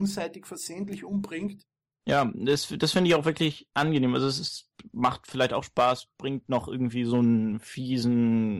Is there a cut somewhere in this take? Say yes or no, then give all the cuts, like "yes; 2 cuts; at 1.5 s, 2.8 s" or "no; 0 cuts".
no; 0 cuts